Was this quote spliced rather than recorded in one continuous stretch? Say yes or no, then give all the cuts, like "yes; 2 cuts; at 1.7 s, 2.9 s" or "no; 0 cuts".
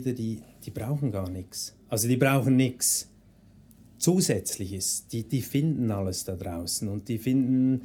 no; 0 cuts